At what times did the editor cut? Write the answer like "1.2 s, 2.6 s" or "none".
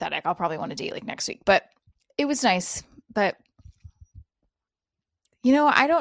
none